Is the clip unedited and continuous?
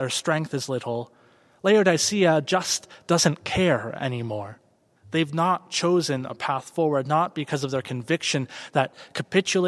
no; 1 cut; at 5.0 s

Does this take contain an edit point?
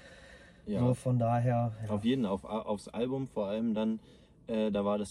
no; 0 cuts

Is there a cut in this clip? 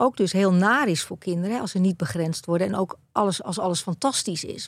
no; 0 cuts

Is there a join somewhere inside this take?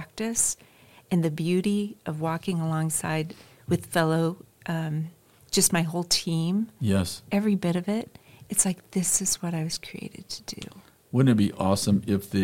no; 0 cuts

